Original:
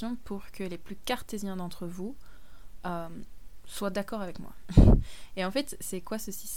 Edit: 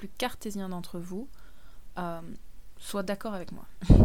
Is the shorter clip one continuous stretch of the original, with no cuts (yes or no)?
yes